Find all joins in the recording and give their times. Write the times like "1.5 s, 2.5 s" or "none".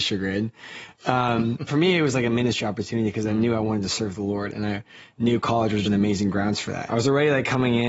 1.7 s, 5.8 s, 6.9 s